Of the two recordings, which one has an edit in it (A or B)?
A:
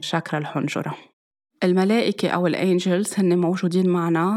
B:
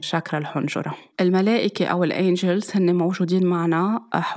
B